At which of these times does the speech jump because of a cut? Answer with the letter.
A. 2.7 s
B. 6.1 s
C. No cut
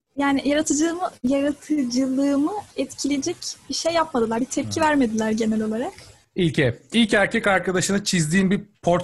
A